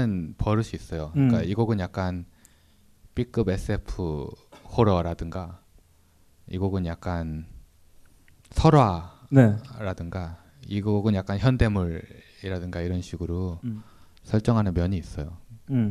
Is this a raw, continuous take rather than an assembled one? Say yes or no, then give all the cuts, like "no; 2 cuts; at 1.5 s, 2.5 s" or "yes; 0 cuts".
yes; 0 cuts